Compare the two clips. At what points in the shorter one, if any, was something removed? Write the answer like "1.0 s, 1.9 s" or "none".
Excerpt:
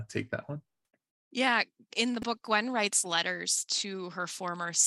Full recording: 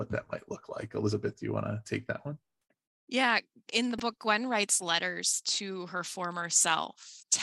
none